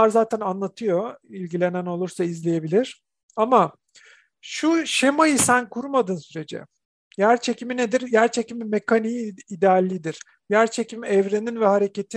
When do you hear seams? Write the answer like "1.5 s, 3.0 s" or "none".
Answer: none